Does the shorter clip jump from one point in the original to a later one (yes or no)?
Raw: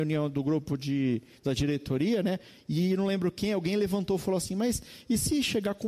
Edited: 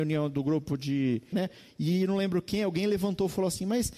yes